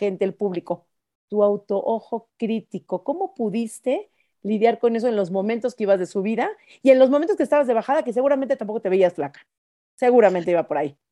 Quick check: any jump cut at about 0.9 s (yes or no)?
no